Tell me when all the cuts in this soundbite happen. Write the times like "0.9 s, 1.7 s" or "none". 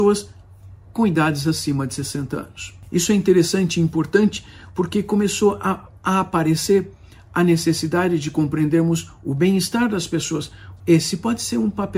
6.0 s, 10.8 s